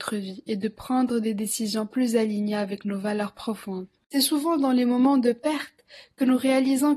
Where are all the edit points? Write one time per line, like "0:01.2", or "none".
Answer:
0:04.0